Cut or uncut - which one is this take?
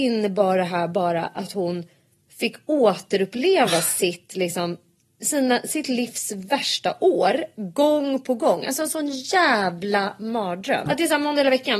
cut